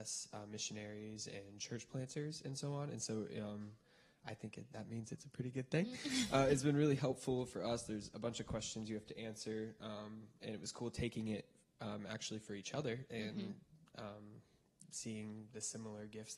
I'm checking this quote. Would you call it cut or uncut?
uncut